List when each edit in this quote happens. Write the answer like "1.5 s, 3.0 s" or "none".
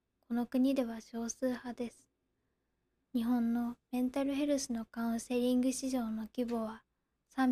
3.0 s